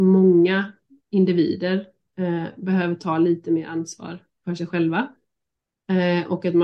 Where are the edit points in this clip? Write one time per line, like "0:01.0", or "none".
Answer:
none